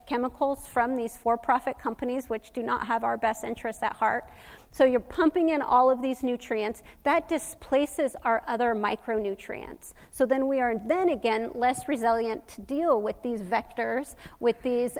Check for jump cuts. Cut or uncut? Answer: uncut